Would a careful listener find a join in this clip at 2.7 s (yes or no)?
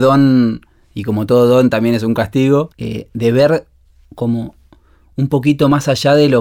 yes